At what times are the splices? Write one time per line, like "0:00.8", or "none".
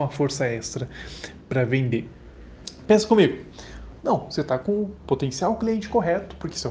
0:04.0